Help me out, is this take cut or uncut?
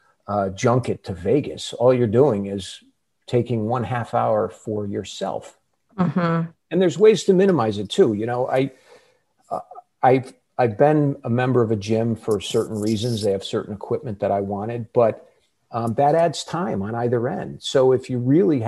uncut